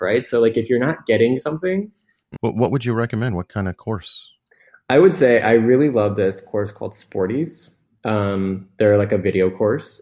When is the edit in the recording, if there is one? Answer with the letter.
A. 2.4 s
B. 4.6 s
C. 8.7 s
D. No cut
A